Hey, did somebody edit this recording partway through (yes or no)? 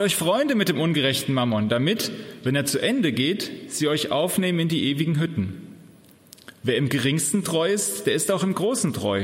no